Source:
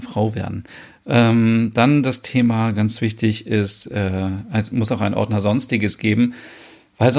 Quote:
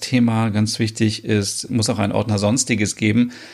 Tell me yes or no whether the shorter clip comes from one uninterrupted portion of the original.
no